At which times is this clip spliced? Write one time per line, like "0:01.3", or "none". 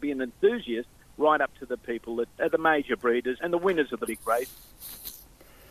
0:02.4
0:03.4